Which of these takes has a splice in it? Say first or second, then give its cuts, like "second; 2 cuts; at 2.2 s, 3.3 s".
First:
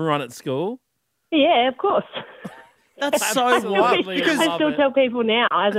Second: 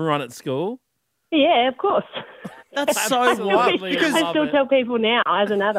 second; 1 cut; at 2.6 s